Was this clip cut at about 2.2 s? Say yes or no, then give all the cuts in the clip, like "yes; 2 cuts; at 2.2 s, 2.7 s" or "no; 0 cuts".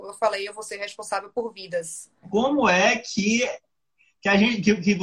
yes; 1 cut; at 2.2 s